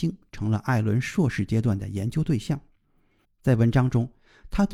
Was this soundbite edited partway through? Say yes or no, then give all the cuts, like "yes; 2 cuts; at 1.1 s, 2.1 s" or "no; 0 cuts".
yes; 1 cut; at 3.2 s